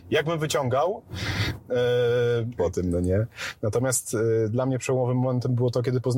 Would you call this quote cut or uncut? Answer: cut